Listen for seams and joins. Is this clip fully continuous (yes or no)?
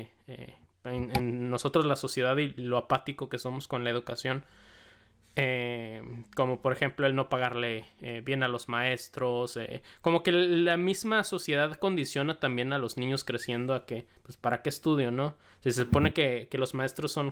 yes